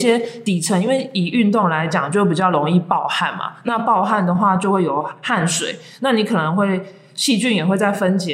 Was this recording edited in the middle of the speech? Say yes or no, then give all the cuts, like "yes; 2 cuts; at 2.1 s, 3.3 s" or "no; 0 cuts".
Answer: no; 0 cuts